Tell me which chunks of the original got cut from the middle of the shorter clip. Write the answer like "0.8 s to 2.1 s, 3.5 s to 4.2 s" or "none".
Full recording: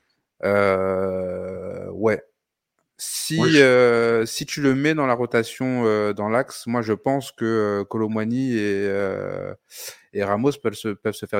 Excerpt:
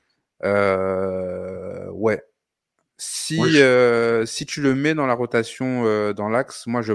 none